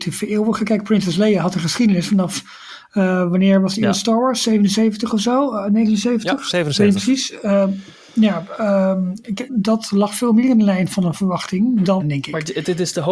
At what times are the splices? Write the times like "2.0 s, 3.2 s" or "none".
9.5 s, 12.0 s